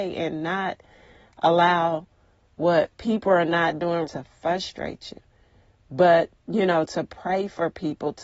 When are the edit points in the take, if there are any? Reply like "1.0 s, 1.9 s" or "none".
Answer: 4.0 s